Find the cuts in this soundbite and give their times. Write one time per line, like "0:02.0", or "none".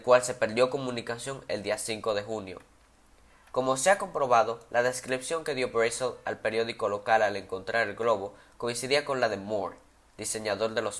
none